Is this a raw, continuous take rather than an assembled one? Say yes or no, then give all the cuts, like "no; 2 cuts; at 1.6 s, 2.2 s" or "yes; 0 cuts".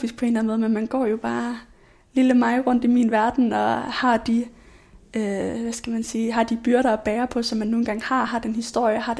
yes; 0 cuts